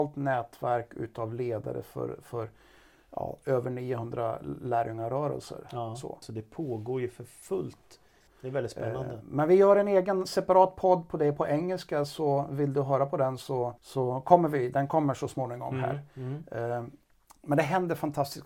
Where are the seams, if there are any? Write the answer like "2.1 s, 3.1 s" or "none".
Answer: 6.2 s, 8.3 s, 13.8 s